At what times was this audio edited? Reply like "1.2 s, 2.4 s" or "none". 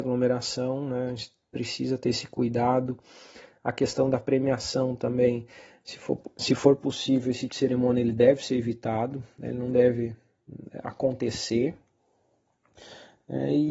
7.5 s